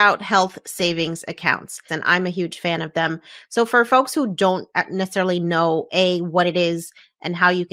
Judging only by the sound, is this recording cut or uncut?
cut